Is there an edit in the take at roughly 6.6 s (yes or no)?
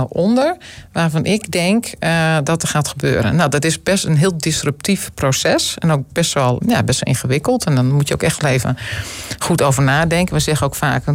yes